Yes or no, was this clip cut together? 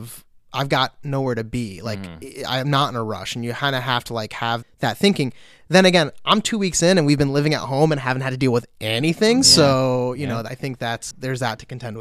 yes